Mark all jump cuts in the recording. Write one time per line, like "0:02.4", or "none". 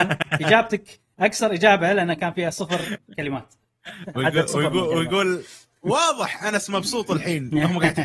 none